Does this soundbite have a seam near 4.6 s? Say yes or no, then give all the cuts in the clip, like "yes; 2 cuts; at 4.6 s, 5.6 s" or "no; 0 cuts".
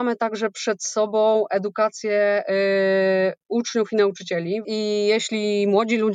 yes; 1 cut; at 4.6 s